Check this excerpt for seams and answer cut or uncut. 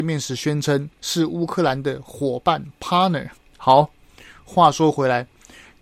cut